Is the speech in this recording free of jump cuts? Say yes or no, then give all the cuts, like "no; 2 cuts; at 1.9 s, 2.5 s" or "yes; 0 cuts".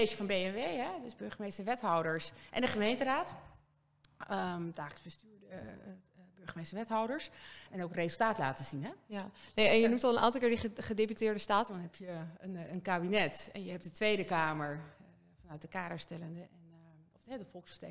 no; 2 cuts; at 7.7 s, 11.7 s